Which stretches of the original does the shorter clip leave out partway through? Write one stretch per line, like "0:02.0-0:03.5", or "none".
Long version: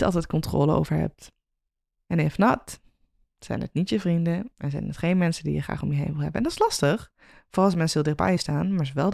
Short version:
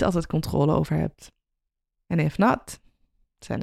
none